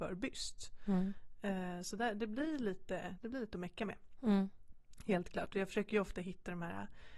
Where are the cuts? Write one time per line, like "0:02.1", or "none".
0:03.2